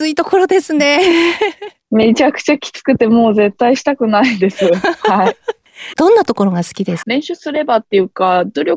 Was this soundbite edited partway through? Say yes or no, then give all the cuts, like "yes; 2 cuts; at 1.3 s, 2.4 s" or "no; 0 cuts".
yes; 2 cuts; at 5.9 s, 7.0 s